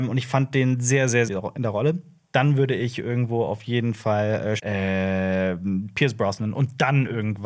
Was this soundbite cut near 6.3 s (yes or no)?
no